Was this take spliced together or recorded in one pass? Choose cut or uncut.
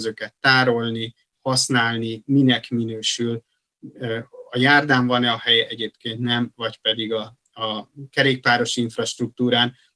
uncut